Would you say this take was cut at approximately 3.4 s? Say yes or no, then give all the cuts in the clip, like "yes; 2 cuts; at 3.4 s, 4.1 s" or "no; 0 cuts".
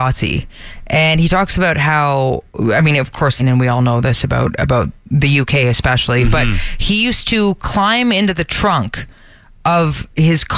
yes; 1 cut; at 3.4 s